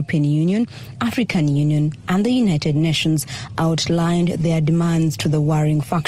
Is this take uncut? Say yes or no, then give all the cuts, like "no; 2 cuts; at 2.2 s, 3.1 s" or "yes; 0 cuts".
yes; 0 cuts